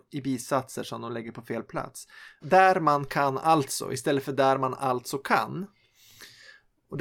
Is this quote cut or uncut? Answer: cut